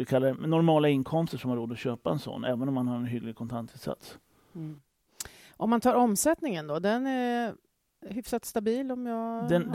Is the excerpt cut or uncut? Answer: uncut